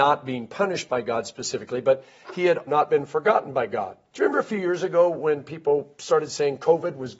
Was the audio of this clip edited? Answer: yes; 2 cuts; at 2.7 s, 4.1 s

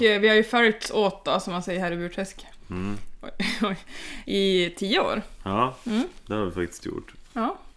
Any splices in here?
no; 0 cuts

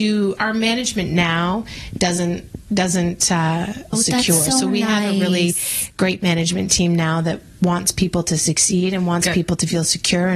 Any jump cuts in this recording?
yes; 1 cut; at 3.9 s

